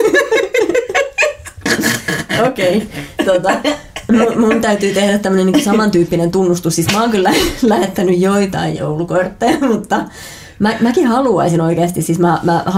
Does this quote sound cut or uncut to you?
cut